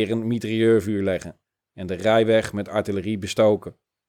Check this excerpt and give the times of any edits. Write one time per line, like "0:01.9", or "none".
none